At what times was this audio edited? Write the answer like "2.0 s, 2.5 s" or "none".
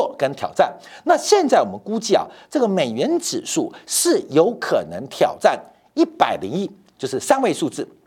none